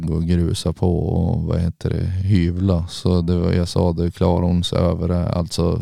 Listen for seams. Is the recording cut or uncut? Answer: uncut